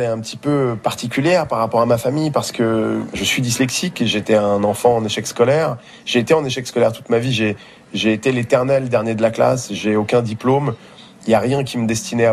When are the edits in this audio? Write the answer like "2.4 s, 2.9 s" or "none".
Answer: none